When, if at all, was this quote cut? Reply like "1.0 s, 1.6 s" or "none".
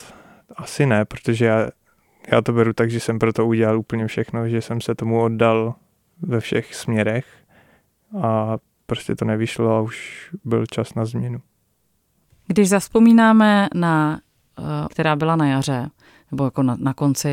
14.9 s